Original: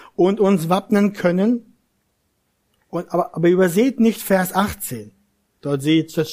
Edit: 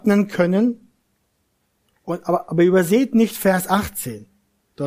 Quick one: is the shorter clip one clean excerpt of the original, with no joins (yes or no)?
yes